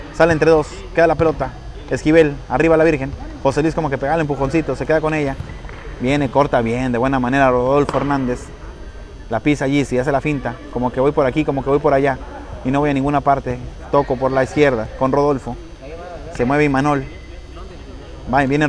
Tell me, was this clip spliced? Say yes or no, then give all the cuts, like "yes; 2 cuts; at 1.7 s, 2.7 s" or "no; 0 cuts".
no; 0 cuts